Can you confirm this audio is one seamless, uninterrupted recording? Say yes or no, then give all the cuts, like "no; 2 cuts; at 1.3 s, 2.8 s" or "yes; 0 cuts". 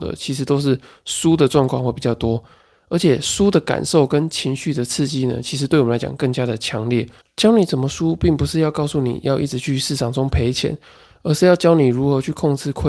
no; 1 cut; at 7.2 s